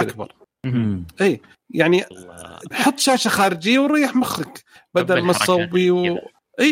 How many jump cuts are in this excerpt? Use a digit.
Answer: 1